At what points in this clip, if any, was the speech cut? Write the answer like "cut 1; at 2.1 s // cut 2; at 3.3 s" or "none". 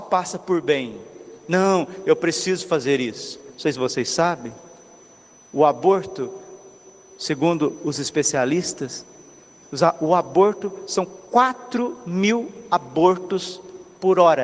none